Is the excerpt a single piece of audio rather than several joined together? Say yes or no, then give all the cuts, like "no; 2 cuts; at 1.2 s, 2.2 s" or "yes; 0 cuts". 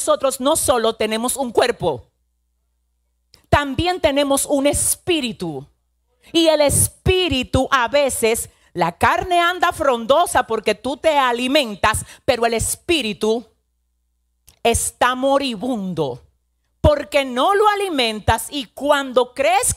yes; 0 cuts